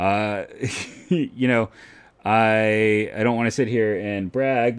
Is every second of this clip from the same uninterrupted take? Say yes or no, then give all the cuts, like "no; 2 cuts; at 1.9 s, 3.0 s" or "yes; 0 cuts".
yes; 0 cuts